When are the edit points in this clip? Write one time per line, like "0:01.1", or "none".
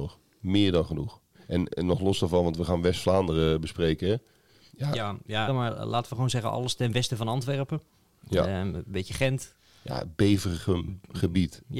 0:05.5